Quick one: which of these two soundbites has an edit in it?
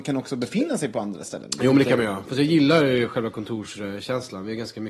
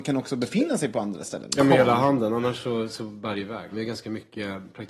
second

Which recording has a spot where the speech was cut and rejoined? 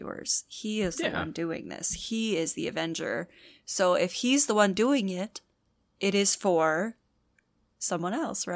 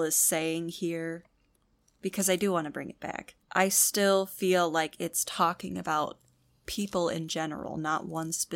second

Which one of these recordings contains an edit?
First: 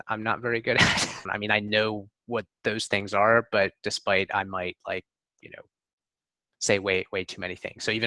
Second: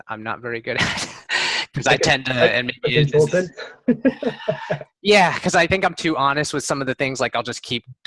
first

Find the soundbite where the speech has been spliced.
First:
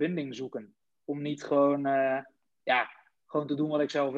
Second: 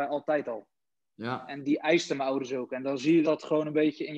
second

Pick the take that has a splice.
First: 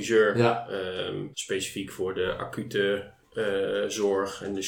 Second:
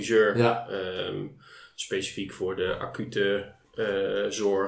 first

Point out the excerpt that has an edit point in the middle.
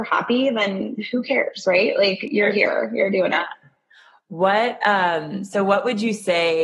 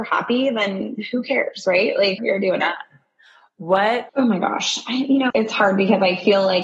second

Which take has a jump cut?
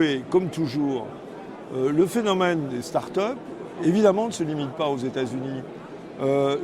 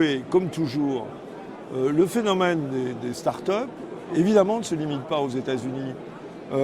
first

